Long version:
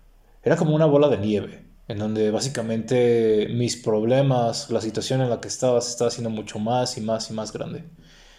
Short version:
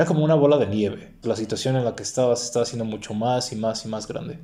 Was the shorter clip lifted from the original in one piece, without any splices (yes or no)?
no